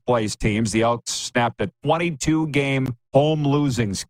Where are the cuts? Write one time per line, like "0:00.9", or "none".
0:03.1